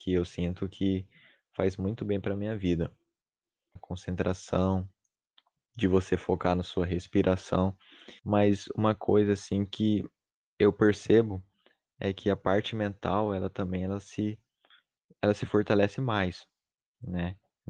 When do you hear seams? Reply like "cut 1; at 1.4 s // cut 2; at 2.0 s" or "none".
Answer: cut 1; at 3.8 s // cut 2; at 8.2 s